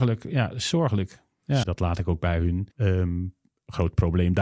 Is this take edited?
yes; 2 cuts; at 1.6 s, 2.7 s

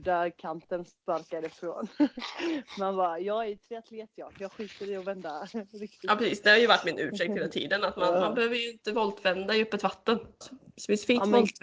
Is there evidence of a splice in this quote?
yes; 1 cut; at 10.4 s

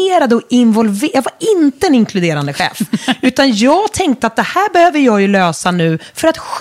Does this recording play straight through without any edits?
yes; 0 cuts

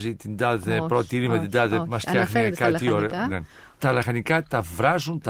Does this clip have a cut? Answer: no; 0 cuts

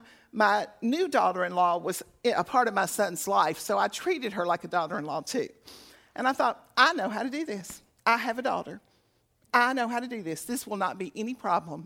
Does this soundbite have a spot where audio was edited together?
no; 0 cuts

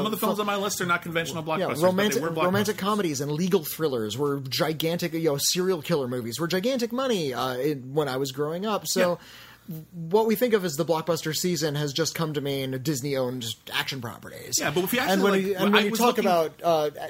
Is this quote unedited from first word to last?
yes; 0 cuts

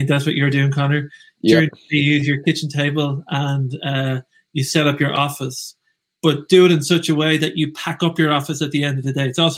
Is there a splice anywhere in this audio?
no; 0 cuts

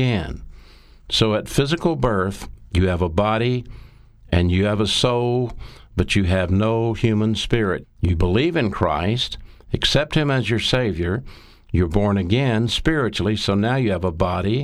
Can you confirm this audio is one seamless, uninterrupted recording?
no; 1 cut; at 7.8 s

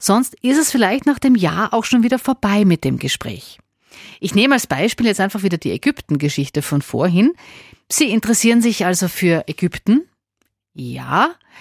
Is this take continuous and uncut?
yes; 0 cuts

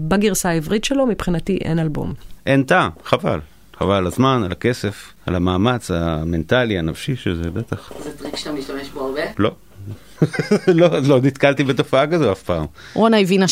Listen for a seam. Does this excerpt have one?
yes; 1 cut; at 2.4 s

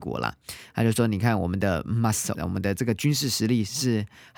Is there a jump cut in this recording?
yes; 1 cut; at 2.3 s

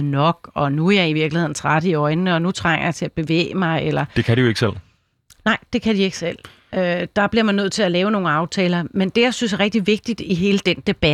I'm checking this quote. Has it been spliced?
no; 0 cuts

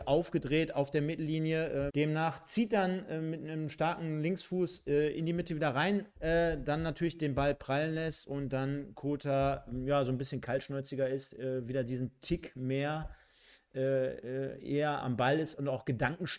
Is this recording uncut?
no; 3 cuts; at 1.9 s, 6.1 s, 15.0 s

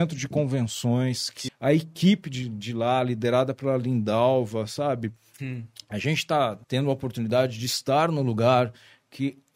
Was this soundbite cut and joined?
yes; 3 cuts; at 1.5 s, 5.4 s, 6.6 s

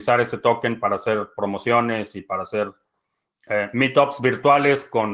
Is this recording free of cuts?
yes; 0 cuts

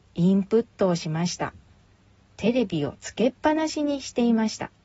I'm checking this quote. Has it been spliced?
no; 0 cuts

